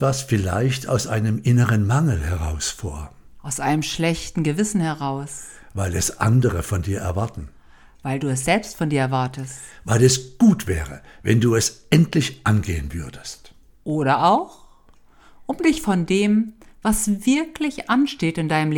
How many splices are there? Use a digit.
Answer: 0